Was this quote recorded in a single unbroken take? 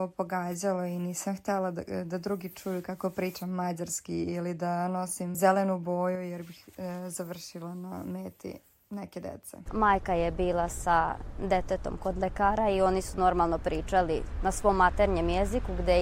no; 2 cuts; at 5.3 s, 9.7 s

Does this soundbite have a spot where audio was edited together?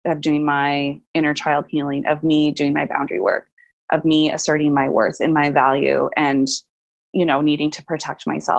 no; 0 cuts

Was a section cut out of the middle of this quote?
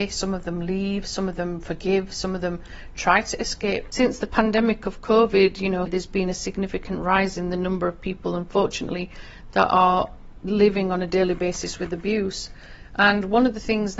yes; 2 cuts; at 3.9 s, 5.9 s

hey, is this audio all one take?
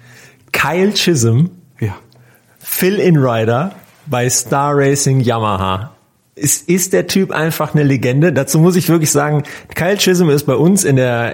yes; 0 cuts

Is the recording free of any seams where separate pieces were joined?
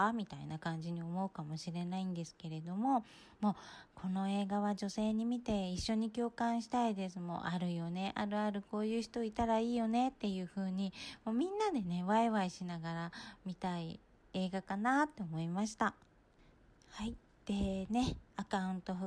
yes; 0 cuts

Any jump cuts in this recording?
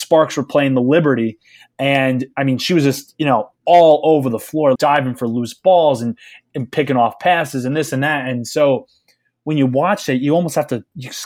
yes; 1 cut; at 4.7 s

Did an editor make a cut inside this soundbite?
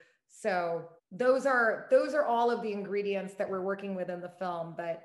yes; 1 cut; at 1.0 s

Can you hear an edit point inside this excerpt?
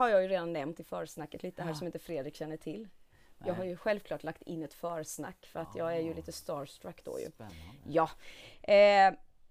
no; 0 cuts

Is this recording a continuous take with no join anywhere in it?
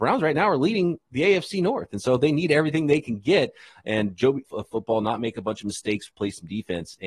no; 2 cuts; at 4.4 s, 6.1 s

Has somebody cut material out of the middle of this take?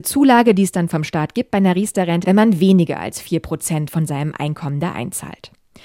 yes; 1 cut; at 2.2 s

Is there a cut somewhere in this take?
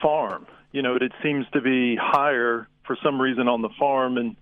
yes; 1 cut; at 0.9 s

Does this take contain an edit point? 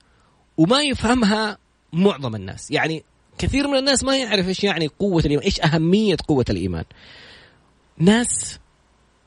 yes; 1 cut; at 7.8 s

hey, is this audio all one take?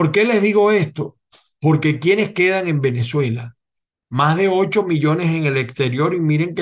yes; 0 cuts

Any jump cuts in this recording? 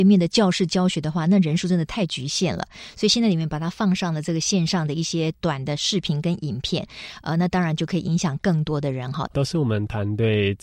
yes; 1 cut; at 9.3 s

